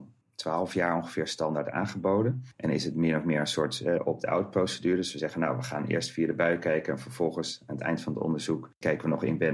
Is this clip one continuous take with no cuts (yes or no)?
no